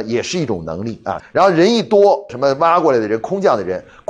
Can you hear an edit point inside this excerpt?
yes; 2 cuts; at 1.2 s, 2.3 s

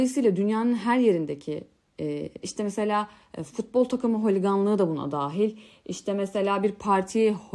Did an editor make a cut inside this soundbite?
yes; 1 cut; at 2.4 s

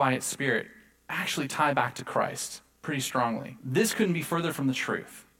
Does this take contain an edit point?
yes; 1 cut; at 3.6 s

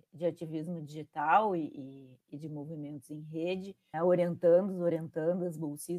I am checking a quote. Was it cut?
yes; 1 cut; at 3.9 s

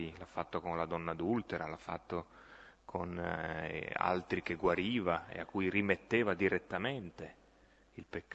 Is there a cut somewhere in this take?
no; 0 cuts

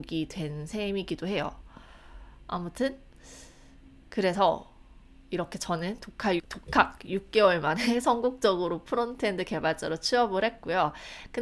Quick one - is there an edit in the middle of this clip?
yes; 1 cut; at 6.4 s

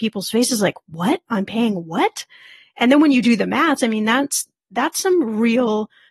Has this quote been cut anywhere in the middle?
yes; 1 cut; at 3.8 s

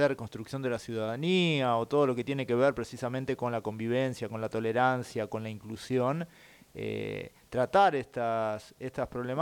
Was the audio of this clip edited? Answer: no; 0 cuts

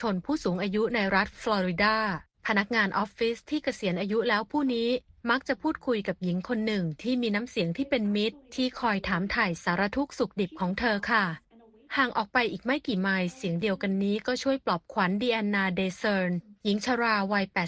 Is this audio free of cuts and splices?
yes; 0 cuts

